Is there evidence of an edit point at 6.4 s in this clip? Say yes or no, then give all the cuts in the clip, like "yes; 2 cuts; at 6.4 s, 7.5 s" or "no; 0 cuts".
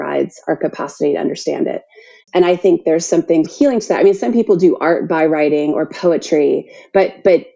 no; 2 cuts; at 2.2 s, 3.4 s